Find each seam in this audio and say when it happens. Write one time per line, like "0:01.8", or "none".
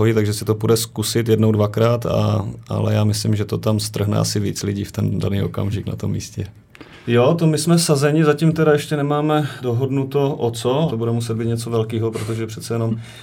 0:07.0
0:09.6
0:10.9